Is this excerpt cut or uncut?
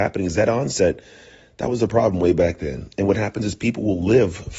uncut